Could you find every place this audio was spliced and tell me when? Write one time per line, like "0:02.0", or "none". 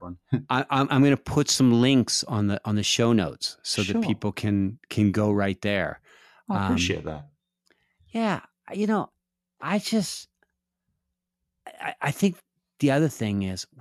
none